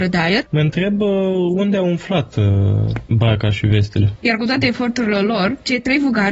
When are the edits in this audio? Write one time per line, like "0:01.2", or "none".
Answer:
0:04.2